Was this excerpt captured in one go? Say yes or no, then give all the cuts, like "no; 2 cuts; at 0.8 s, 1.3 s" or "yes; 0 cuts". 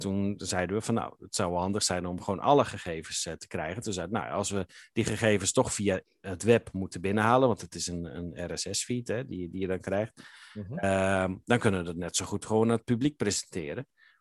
yes; 0 cuts